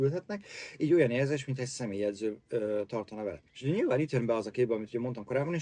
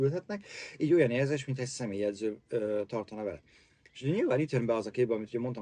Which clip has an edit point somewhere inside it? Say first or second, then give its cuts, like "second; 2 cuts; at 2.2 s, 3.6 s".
first; 1 cut; at 3.5 s